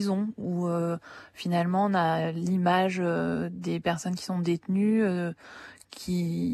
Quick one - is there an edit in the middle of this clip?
no; 0 cuts

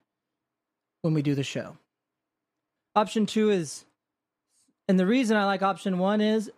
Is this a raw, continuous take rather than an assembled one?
no; 1 cut; at 2.8 s

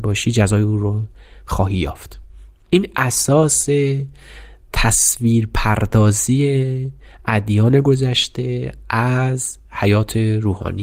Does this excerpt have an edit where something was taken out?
no; 0 cuts

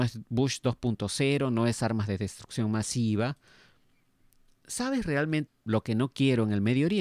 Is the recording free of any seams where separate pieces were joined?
no; 1 cut; at 5.5 s

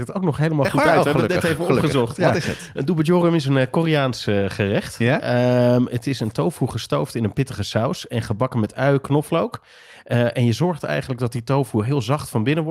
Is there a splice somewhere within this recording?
no; 0 cuts

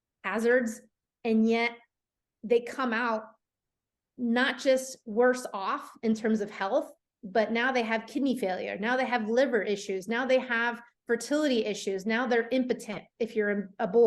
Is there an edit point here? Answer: no; 0 cuts

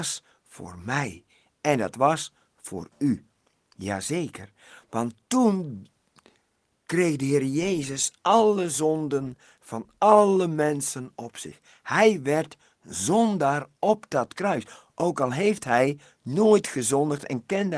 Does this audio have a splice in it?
no; 0 cuts

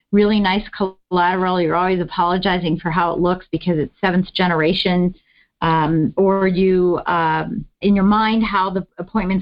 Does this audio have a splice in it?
yes; 1 cut; at 7.8 s

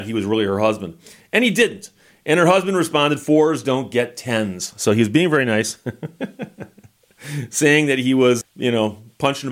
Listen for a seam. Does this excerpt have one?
yes; 1 cut; at 8.4 s

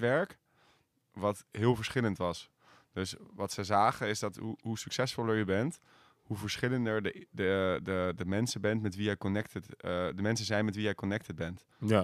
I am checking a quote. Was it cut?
no; 0 cuts

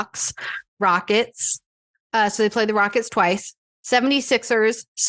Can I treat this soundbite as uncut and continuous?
yes; 0 cuts

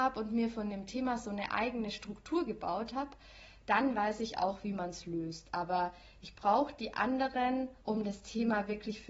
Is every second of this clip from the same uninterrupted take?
no; 1 cut; at 7.8 s

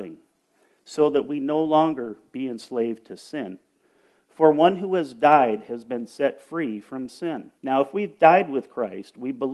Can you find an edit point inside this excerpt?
yes; 1 cut; at 7.6 s

